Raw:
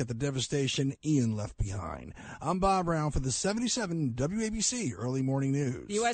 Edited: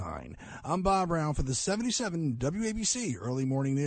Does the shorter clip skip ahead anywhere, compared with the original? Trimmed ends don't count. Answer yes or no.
no